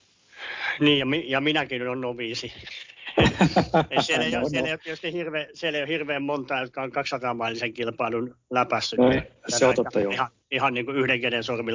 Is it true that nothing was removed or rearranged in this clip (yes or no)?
yes